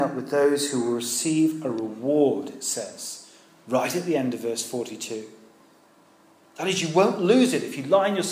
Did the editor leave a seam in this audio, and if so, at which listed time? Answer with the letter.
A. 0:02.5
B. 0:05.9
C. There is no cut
C